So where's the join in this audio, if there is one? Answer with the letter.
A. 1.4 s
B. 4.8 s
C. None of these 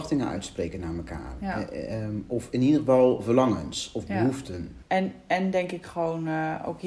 B